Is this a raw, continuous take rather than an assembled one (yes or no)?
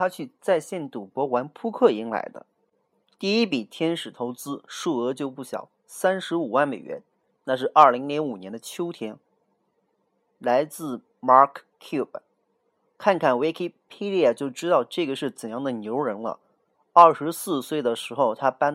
yes